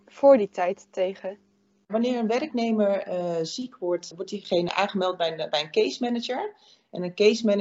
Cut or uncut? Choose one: uncut